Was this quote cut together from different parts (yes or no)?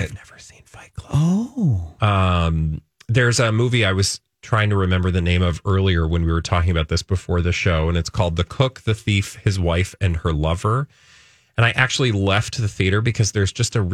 yes